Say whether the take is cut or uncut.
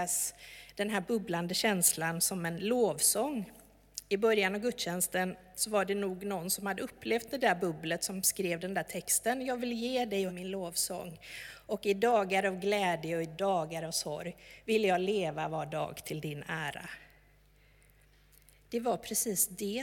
cut